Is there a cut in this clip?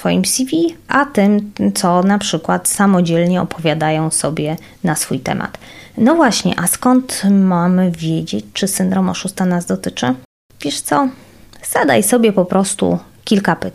no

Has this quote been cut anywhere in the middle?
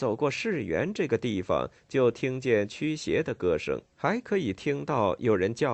yes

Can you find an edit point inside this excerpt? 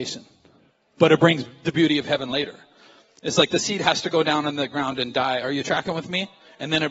no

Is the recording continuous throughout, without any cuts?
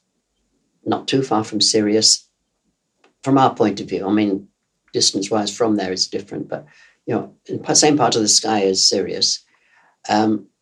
yes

